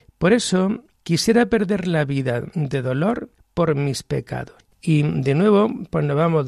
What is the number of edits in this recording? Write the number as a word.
two